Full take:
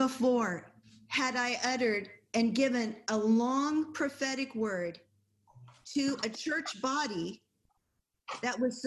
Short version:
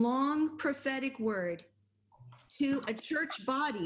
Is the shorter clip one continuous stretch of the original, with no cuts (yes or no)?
yes